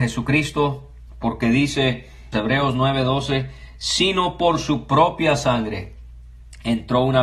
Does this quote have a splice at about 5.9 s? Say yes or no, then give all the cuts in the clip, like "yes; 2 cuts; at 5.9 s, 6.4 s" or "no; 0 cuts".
no; 1 cut; at 2.3 s